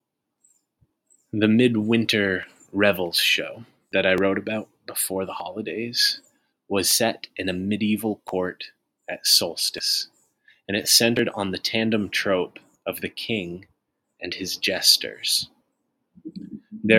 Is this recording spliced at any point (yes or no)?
no